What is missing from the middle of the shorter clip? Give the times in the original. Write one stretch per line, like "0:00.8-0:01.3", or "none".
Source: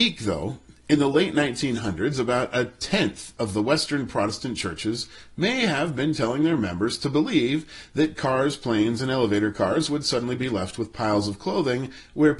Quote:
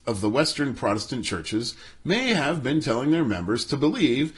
none